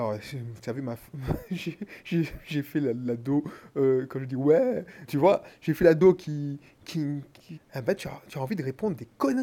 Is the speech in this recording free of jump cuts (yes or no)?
no